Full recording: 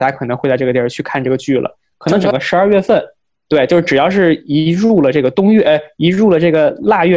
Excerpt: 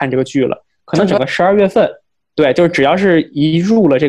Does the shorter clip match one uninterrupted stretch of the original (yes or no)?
yes